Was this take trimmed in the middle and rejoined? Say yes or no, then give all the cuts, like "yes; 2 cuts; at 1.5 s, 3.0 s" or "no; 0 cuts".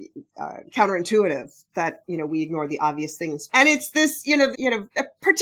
yes; 2 cuts; at 3.5 s, 4.5 s